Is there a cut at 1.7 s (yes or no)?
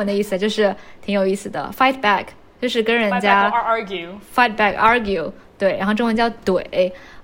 no